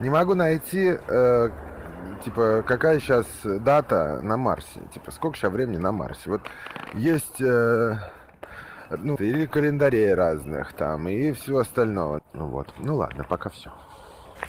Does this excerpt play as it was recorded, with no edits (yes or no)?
no